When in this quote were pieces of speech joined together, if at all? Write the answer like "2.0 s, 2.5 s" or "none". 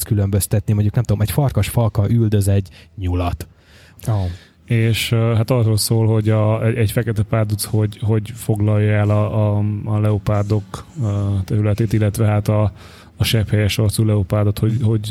4.0 s